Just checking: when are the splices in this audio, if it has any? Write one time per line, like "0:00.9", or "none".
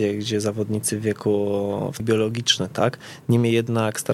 0:02.0